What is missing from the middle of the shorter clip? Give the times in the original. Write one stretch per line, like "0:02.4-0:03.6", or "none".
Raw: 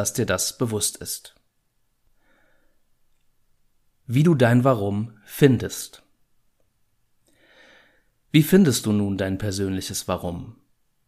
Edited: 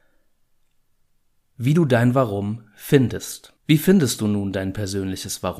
0:06.1-0:08.2